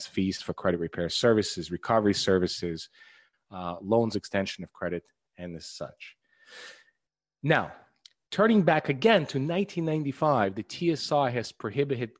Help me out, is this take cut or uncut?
uncut